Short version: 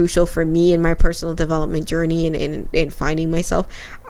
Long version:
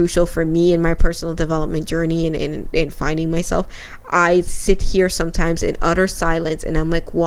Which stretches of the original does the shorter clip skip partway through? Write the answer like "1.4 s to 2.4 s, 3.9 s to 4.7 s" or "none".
none